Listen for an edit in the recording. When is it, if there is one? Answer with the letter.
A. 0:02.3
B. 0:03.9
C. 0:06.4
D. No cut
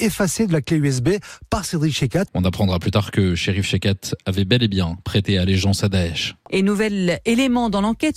A